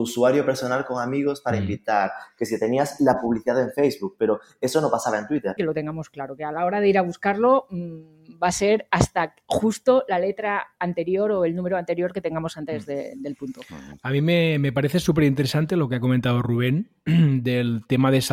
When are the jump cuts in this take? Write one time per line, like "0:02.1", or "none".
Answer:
0:05.6